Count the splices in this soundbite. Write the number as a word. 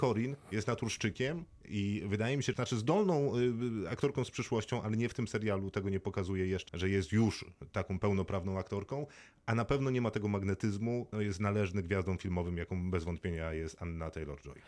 three